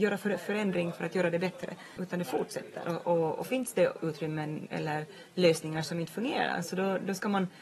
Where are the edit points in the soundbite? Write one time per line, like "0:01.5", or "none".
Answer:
0:02.0